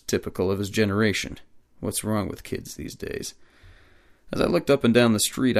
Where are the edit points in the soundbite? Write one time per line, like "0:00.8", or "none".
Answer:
none